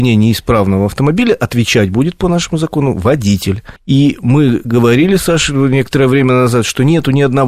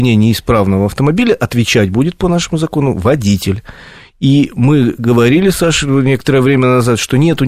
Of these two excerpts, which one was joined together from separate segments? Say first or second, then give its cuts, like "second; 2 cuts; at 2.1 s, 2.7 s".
first; 1 cut; at 3.8 s